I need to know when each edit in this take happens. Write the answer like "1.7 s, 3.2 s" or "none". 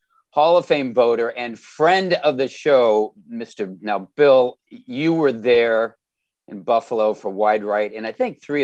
3.8 s